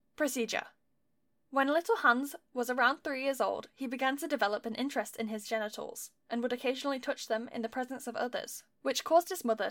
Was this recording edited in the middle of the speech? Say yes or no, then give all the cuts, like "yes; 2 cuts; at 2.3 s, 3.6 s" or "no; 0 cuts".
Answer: no; 0 cuts